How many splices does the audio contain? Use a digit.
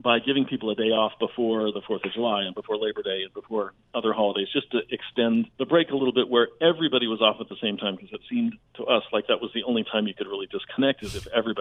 1